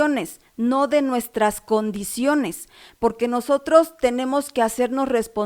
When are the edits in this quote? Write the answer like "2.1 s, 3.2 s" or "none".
none

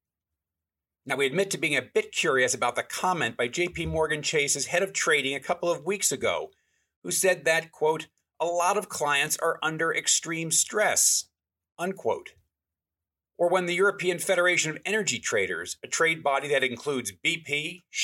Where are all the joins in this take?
none

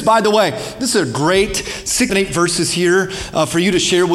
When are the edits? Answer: 2.1 s

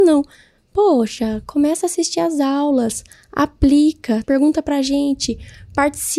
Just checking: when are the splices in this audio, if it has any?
4.2 s

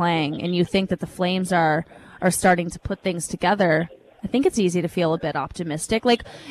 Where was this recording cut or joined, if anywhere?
none

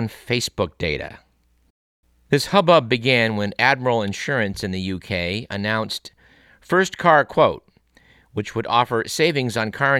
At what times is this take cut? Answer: none

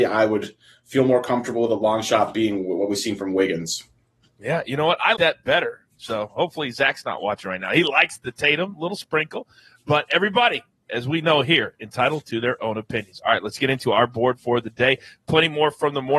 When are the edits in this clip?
5.1 s

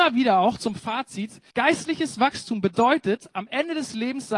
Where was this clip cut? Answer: 1.5 s

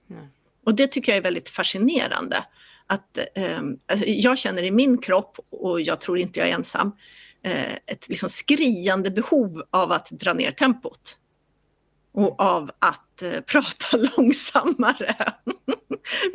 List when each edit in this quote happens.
none

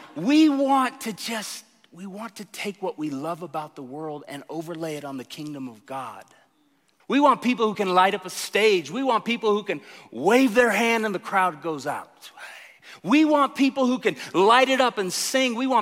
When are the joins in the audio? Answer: 7.0 s

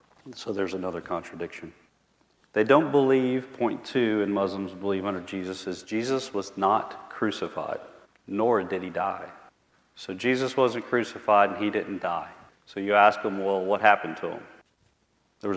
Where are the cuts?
none

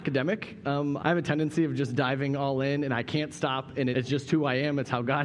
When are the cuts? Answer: 1.0 s, 3.9 s

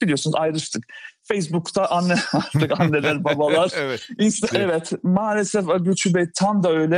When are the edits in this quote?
4.5 s

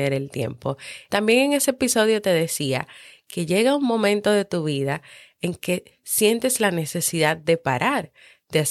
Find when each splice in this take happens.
1.1 s

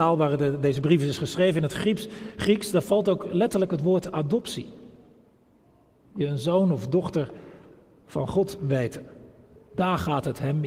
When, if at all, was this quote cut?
6.0 s

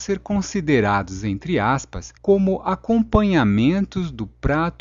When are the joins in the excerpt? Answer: 2.2 s

